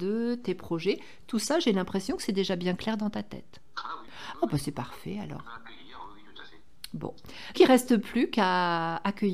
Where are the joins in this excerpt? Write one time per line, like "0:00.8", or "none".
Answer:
0:04.0
0:07.5